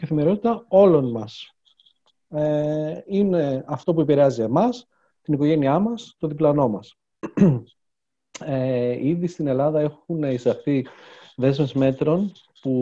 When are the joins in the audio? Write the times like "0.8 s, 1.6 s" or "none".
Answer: none